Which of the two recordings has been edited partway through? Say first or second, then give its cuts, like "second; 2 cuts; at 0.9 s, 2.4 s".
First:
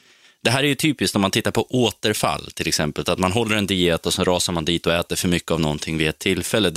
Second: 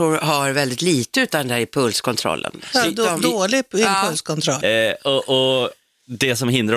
second; 1 cut; at 4.6 s